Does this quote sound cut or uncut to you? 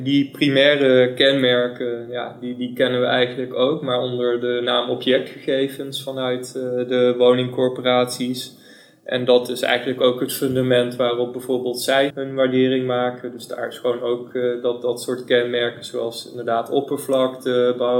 cut